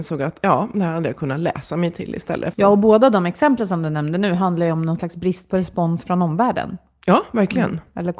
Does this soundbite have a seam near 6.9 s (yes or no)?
no